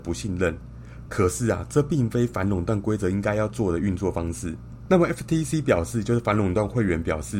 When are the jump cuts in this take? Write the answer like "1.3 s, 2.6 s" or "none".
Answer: none